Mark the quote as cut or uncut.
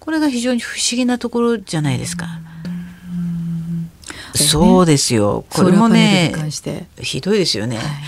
cut